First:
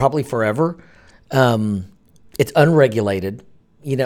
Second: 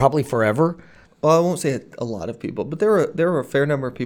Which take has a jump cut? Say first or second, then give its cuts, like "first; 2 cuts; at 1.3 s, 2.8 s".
second; 1 cut; at 1.0 s